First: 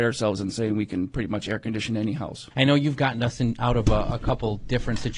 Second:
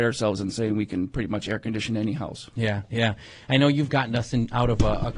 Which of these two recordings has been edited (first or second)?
first